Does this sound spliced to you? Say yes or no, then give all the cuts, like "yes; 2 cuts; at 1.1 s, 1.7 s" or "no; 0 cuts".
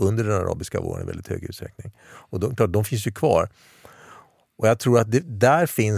no; 0 cuts